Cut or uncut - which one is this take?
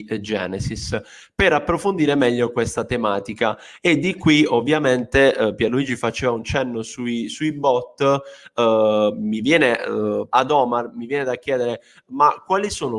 cut